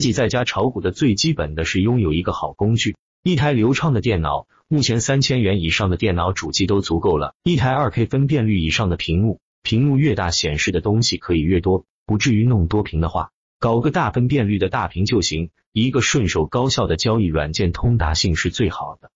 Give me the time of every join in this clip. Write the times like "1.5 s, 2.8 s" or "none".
none